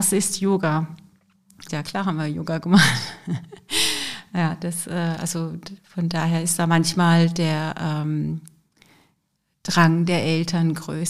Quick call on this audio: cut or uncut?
cut